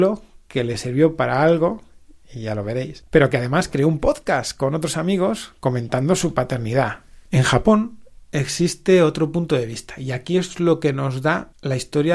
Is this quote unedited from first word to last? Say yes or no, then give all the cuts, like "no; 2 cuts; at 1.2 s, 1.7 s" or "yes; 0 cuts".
no; 1 cut; at 7.3 s